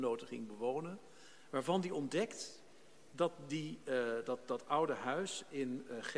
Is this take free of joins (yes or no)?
yes